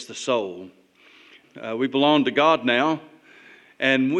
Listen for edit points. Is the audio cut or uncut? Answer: cut